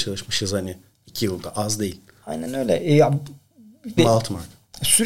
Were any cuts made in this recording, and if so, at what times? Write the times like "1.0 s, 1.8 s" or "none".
4.0 s